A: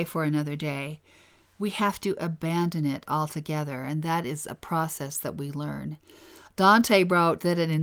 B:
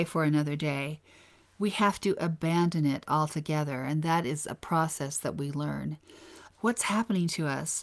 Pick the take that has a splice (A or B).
B